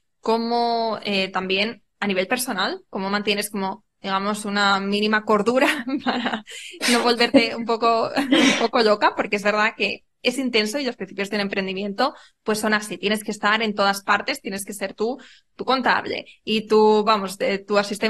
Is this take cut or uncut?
uncut